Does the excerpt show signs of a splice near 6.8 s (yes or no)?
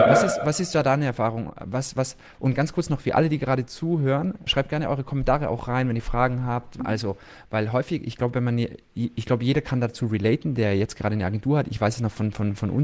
yes